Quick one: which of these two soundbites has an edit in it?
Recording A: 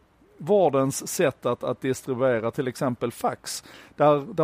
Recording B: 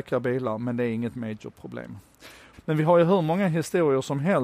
B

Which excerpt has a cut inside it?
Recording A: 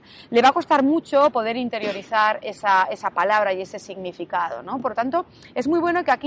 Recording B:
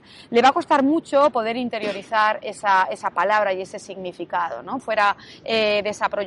B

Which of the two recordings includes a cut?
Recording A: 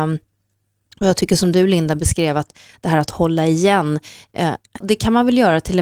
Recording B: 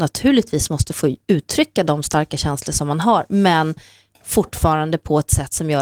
A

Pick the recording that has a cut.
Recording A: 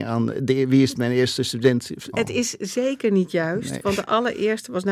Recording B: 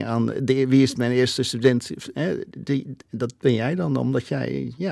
A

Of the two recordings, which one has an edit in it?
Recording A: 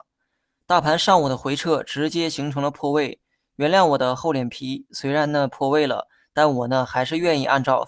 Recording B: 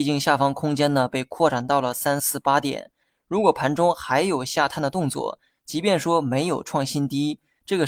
B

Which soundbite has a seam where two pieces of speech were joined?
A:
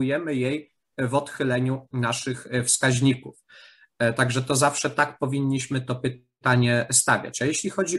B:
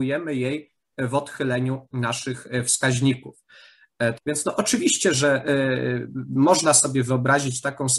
B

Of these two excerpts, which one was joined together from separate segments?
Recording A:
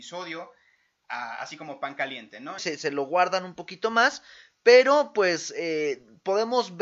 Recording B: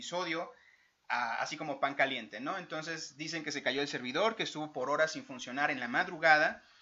A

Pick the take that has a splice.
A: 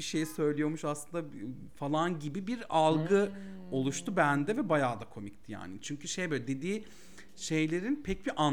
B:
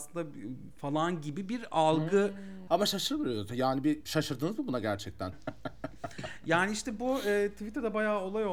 B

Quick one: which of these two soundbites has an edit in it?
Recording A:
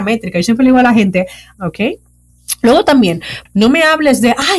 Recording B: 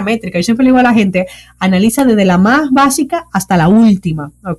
A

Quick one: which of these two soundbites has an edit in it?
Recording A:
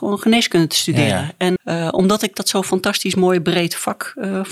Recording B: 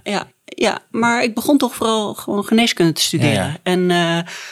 A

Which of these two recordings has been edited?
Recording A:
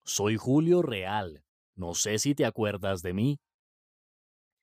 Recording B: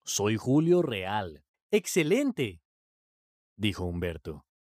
B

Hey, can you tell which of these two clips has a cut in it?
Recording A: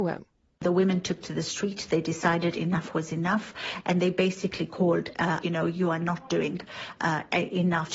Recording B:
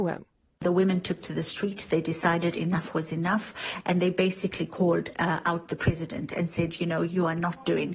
A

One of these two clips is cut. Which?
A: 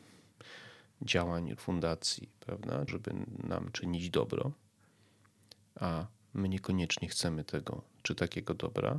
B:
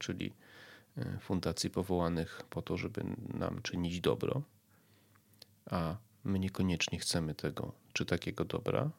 A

